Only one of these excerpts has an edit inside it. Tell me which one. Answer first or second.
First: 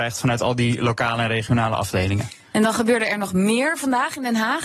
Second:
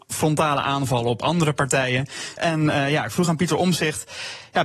second